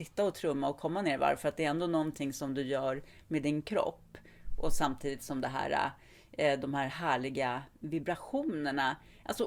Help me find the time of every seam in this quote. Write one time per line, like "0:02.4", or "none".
none